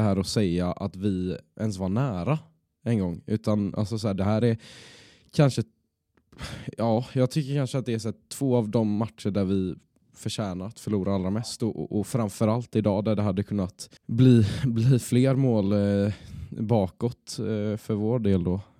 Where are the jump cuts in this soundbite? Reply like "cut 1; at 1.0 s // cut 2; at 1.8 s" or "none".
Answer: cut 1; at 14.0 s